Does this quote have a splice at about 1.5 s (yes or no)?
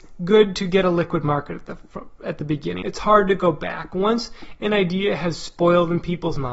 no